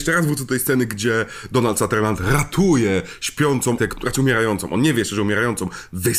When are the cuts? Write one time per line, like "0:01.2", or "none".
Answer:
0:03.8